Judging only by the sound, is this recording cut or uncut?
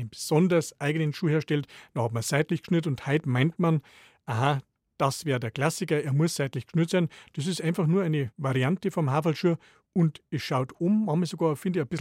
uncut